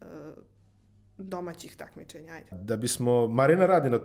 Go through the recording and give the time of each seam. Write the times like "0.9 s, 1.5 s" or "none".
2.5 s